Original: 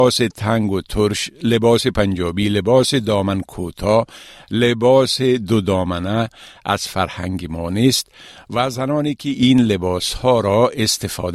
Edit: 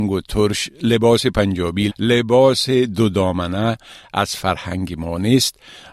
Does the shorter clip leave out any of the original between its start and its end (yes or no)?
yes